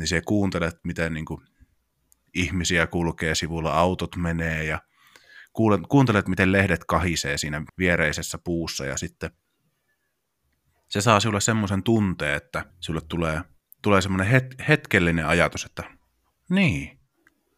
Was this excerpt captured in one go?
no; 2 cuts; at 7.7 s, 12.7 s

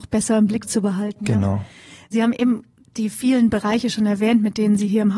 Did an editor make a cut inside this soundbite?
no; 0 cuts

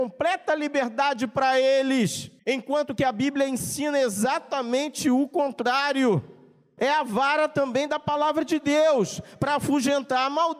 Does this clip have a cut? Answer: yes; 2 cuts; at 2.4 s, 6.8 s

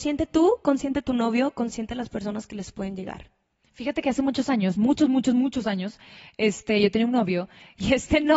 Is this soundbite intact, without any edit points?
yes; 0 cuts

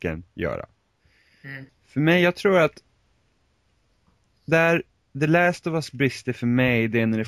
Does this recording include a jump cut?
yes; 1 cut; at 1.7 s

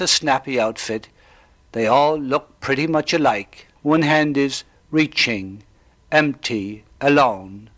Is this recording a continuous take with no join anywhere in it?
no; 1 cut; at 3.8 s

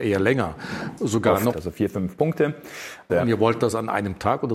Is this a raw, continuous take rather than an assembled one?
no; 2 cuts; at 1.5 s, 3.1 s

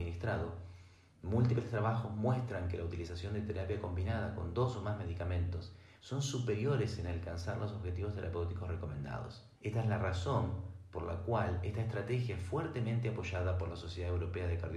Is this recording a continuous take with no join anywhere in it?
no; 2 cuts; at 6.0 s, 9.6 s

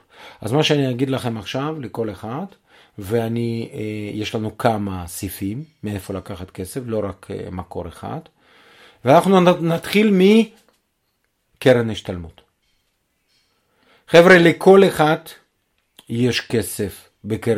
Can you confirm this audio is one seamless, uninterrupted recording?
yes; 0 cuts

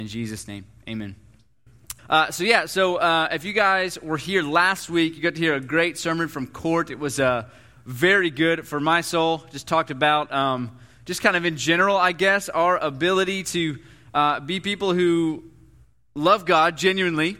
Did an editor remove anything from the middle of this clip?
yes; 1 cut; at 2.0 s

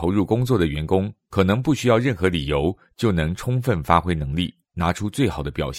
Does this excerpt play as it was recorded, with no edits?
yes; 0 cuts

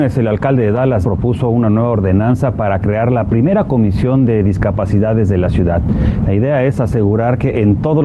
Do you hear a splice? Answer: yes; 1 cut; at 1.0 s

